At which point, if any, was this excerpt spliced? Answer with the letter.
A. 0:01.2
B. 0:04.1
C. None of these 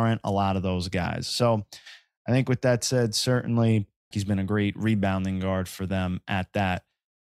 B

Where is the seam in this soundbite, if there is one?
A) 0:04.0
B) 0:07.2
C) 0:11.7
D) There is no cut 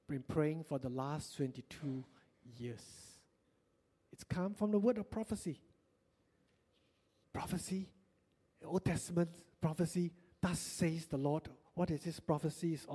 B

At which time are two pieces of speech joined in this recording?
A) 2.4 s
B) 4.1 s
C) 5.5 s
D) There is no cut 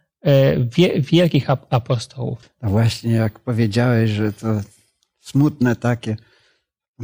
A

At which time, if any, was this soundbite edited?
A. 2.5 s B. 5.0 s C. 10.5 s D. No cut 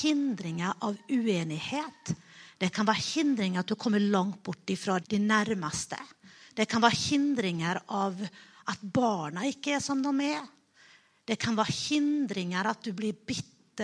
B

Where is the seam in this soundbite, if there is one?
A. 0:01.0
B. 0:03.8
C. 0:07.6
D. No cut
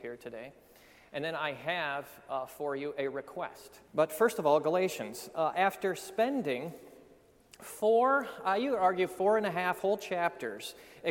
B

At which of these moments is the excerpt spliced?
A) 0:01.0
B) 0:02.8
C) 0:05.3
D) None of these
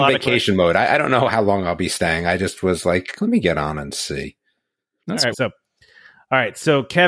C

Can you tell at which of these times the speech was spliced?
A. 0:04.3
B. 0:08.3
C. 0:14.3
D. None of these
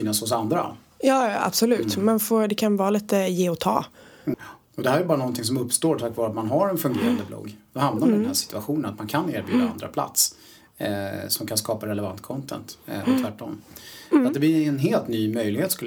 A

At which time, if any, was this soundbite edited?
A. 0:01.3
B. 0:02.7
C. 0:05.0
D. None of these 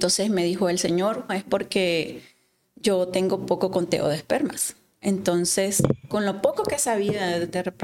A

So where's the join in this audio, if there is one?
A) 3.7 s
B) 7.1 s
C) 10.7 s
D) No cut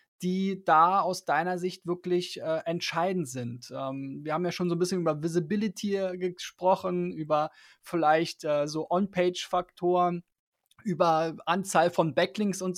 D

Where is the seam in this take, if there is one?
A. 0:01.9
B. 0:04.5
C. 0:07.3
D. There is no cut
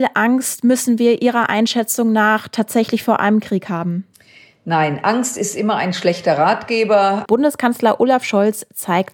C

